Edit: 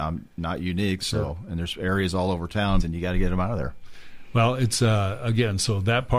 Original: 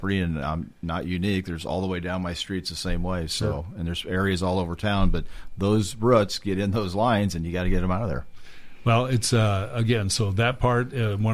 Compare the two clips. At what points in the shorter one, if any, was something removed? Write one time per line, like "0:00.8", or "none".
0:01.0
0:02.8